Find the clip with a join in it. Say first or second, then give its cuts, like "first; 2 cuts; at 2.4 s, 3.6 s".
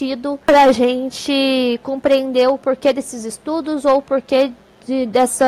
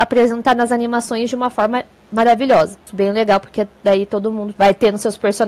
second; 2 cuts; at 2.8 s, 4.5 s